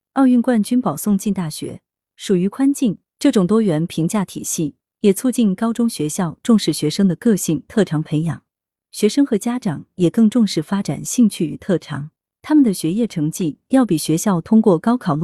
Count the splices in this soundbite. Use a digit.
2